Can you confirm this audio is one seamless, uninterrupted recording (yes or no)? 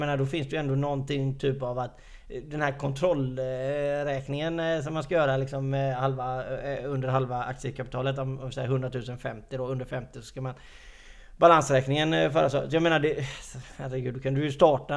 yes